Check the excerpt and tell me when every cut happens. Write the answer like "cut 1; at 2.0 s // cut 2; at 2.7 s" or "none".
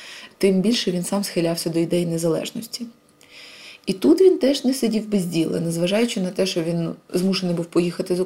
cut 1; at 3.8 s

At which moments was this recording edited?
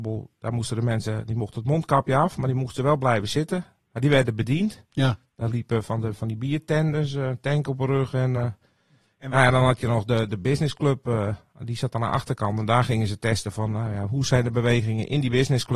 none

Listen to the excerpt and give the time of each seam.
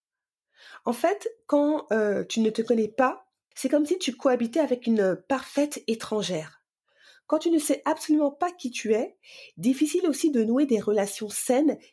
cut 1; at 3.5 s

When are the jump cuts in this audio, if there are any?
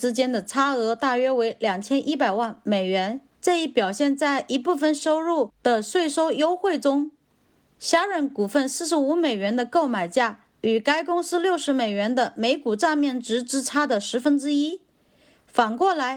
cut 1; at 3.4 s

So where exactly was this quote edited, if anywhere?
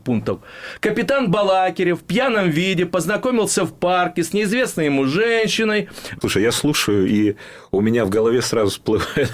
cut 1; at 6.2 s

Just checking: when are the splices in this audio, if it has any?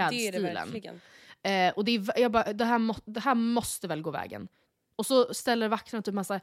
none

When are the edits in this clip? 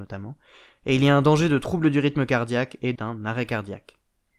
cut 1; at 2.9 s

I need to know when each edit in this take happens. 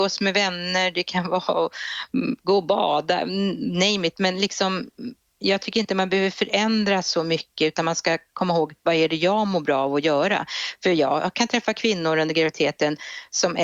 none

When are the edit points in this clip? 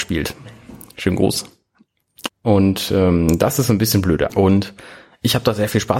cut 1; at 2.3 s // cut 2; at 4.3 s

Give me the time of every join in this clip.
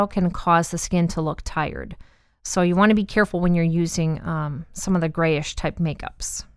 none

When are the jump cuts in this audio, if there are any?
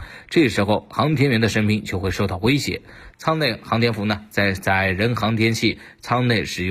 cut 1; at 3.1 s

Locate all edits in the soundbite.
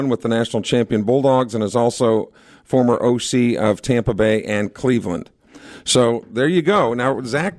none

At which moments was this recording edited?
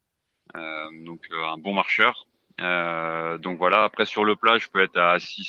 none

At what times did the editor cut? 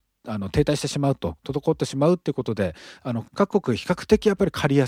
cut 1; at 3.3 s

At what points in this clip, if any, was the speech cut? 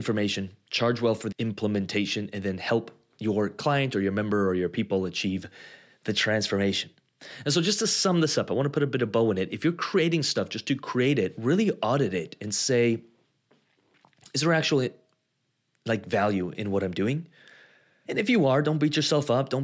cut 1; at 1.3 s // cut 2; at 18.1 s

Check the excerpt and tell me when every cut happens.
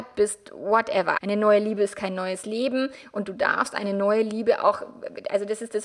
cut 1; at 1.2 s

